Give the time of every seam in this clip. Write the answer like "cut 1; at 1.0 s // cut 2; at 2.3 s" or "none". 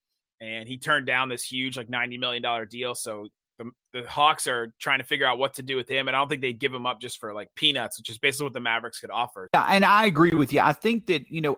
cut 1; at 9.5 s